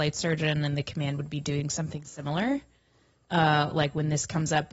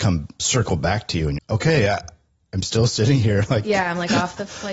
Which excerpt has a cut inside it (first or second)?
second